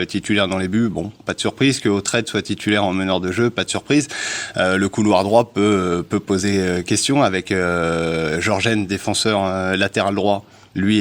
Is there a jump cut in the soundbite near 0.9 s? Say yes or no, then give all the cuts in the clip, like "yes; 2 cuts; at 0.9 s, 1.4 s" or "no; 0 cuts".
no; 0 cuts